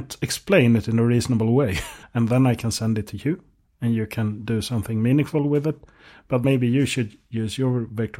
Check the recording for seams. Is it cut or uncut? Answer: cut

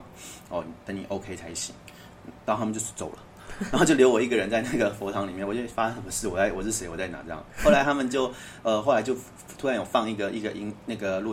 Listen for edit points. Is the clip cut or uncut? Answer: uncut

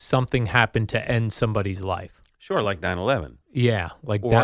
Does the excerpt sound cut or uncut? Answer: uncut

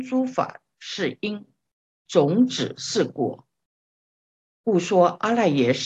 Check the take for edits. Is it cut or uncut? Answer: uncut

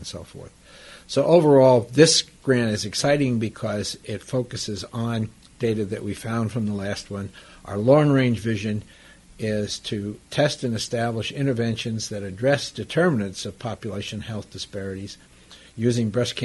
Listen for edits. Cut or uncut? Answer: uncut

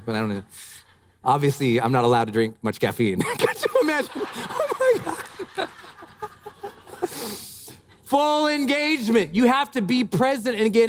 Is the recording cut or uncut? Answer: uncut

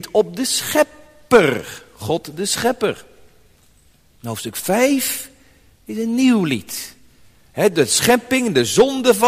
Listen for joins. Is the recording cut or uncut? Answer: uncut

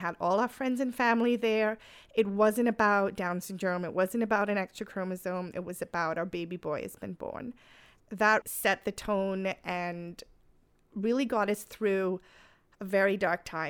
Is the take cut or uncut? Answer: cut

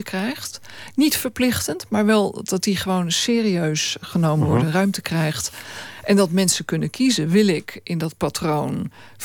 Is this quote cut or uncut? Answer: uncut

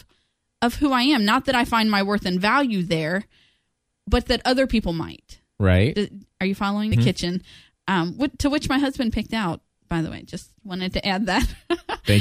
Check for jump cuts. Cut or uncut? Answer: cut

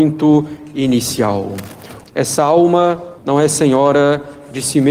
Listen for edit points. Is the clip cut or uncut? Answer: cut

